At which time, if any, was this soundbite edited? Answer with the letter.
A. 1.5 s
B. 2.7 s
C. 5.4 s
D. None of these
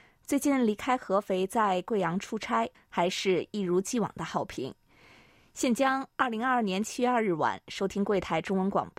B